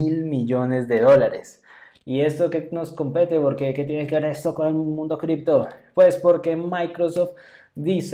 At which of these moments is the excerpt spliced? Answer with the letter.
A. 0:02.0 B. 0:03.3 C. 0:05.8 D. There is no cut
D